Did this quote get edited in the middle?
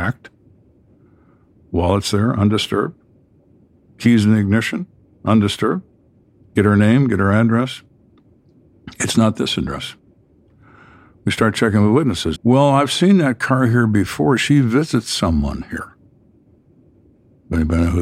yes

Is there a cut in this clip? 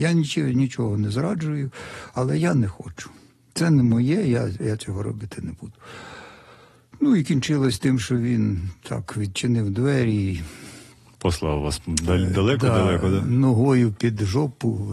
no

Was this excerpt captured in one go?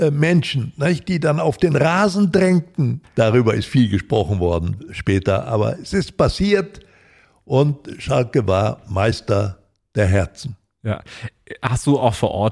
no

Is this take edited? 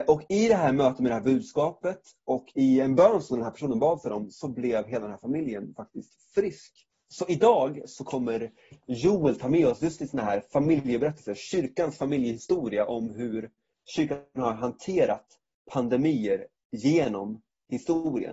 yes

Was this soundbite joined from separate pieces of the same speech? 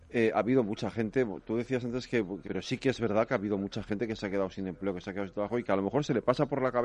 yes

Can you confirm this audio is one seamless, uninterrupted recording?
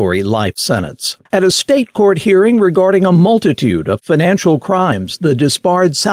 no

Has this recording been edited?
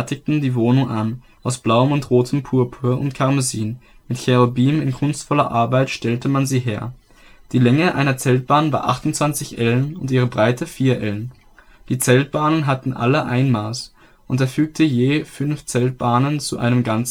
yes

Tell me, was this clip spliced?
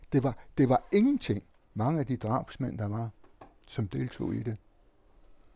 yes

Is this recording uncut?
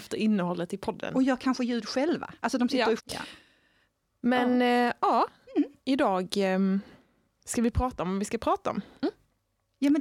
no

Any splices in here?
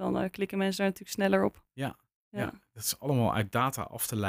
no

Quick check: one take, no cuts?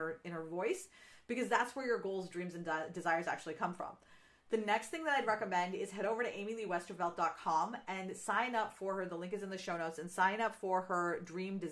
yes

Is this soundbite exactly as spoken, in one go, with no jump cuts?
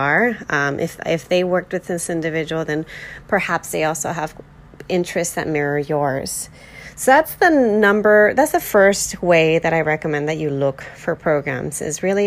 yes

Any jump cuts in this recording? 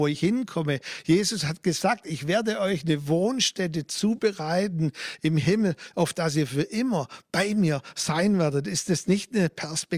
no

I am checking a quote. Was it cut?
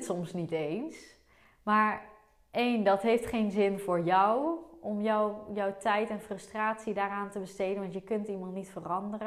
yes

